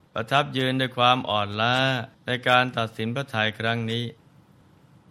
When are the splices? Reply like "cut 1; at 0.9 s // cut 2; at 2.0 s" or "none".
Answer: cut 1; at 2.1 s